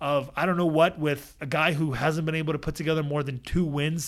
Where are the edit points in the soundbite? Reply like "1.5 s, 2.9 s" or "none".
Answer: 1.4 s